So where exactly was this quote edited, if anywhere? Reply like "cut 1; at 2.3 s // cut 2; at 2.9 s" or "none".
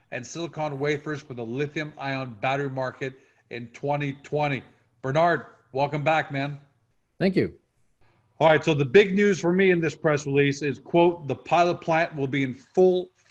none